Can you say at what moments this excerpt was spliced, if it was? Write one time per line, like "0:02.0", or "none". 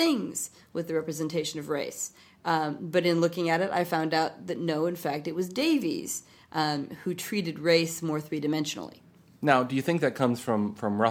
none